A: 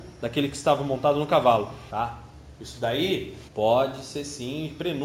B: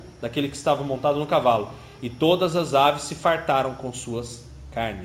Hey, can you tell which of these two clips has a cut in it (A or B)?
A